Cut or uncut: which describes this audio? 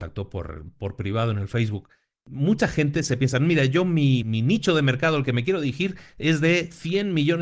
cut